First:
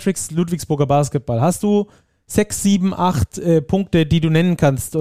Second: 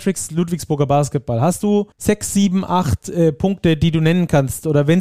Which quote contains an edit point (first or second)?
second